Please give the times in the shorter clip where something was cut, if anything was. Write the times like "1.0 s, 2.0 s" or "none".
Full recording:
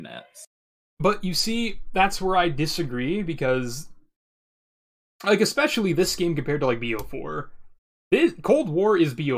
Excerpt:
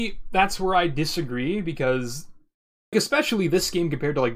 2.9 s